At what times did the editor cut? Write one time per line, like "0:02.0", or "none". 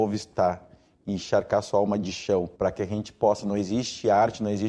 0:02.6